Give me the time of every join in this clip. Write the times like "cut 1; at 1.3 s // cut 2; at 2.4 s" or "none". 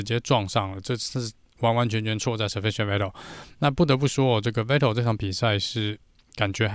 none